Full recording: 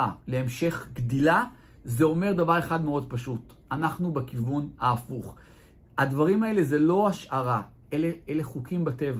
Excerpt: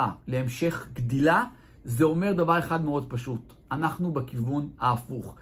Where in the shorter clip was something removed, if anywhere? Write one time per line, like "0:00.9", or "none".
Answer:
none